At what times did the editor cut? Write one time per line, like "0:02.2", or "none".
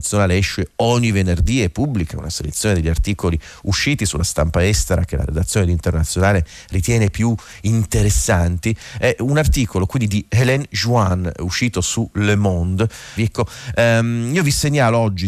0:13.2